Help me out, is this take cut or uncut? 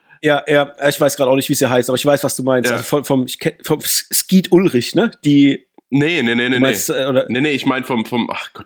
uncut